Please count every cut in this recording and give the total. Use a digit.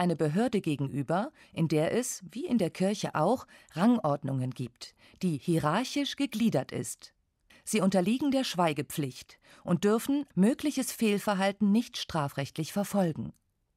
2